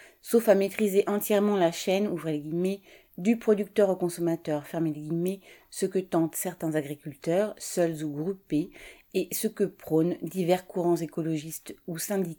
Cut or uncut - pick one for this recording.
uncut